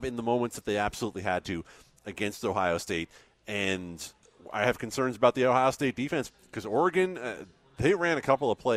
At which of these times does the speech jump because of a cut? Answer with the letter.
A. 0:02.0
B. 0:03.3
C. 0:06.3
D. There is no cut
C